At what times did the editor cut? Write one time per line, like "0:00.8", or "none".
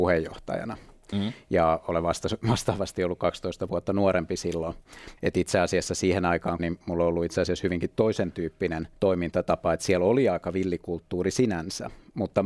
0:05.2
0:06.6
0:08.9